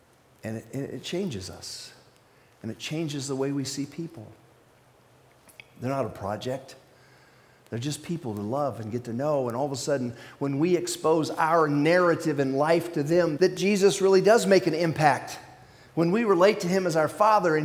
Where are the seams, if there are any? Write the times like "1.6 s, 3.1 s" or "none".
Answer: 13.4 s